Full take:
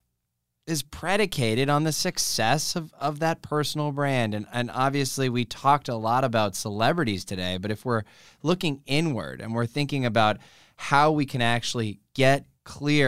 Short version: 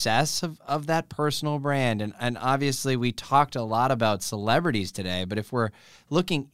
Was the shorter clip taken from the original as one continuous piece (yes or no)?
yes